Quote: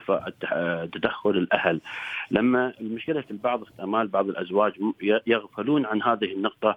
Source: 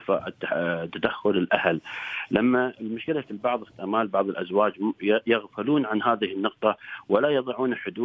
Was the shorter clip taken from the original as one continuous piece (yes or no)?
yes